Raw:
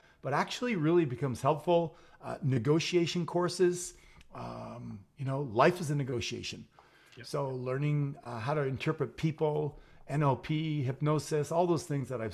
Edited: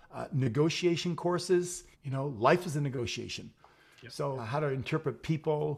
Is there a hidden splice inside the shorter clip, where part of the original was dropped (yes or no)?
yes